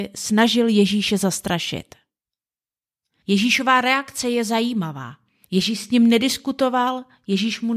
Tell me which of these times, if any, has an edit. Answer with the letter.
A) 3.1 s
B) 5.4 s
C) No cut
C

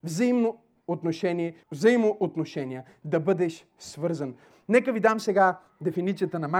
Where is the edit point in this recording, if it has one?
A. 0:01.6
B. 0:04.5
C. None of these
A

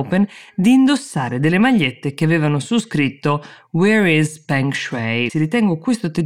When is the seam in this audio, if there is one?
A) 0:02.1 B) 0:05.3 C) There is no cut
B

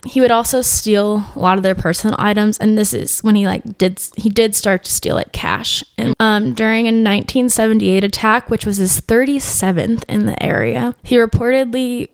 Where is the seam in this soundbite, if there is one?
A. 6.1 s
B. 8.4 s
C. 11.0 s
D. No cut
A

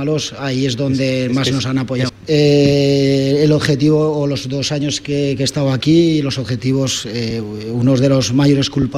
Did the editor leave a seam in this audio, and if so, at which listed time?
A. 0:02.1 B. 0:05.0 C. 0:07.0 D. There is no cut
A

